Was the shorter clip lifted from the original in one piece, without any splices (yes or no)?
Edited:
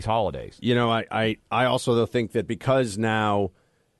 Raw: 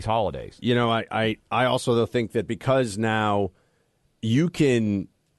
yes